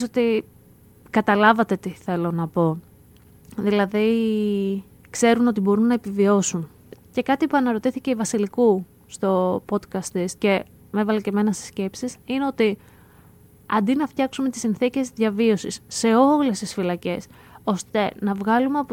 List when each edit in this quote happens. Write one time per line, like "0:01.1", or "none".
0:07.0
0:10.4